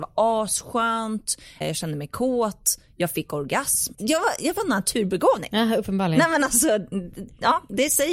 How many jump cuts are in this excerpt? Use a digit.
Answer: 2